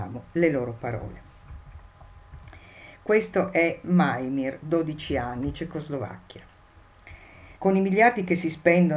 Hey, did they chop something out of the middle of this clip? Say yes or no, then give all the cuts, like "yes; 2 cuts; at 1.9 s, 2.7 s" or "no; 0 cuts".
yes; 1 cut; at 7.6 s